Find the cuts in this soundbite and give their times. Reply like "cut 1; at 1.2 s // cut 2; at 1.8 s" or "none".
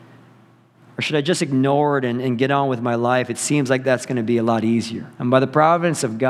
cut 1; at 5.1 s